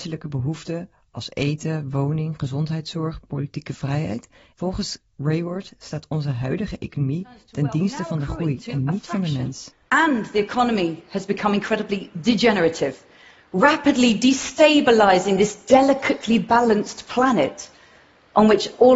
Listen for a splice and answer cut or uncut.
cut